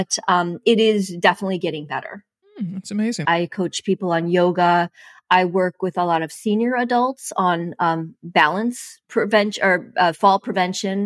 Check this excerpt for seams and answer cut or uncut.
cut